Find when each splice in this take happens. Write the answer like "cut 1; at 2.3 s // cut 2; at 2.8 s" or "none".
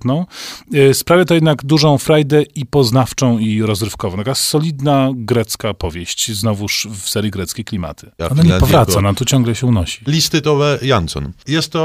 cut 1; at 8.2 s // cut 2; at 10.1 s